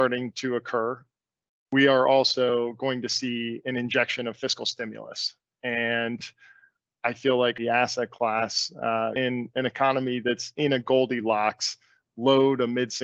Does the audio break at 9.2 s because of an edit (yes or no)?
yes